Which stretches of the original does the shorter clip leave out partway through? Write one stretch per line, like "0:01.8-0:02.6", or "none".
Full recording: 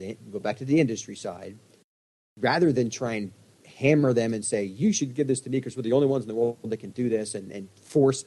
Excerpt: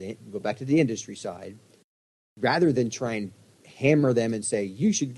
none